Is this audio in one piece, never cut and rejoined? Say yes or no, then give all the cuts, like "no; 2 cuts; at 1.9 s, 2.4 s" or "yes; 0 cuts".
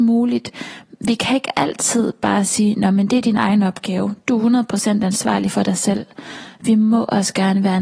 yes; 0 cuts